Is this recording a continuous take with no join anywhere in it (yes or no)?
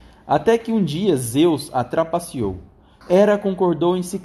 no